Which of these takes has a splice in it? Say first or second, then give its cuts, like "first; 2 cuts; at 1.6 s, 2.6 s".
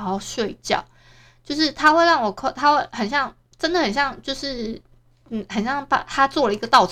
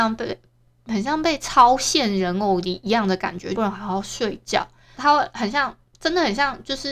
second; 2 cuts; at 3.6 s, 5.0 s